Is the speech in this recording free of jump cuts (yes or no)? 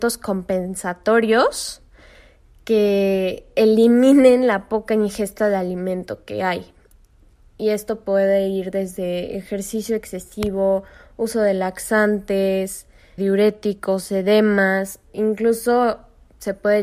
no